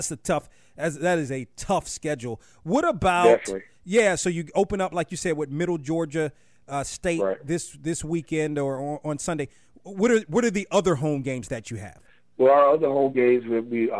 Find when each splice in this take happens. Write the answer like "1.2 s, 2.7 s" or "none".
none